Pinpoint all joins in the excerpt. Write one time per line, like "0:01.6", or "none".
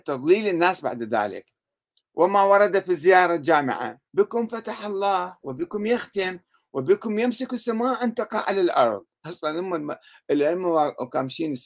0:04.1